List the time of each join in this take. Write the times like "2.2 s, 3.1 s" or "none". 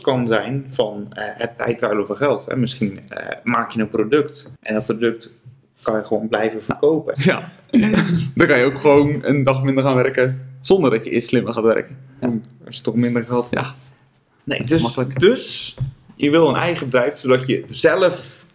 4.6 s, 7.2 s, 12.2 s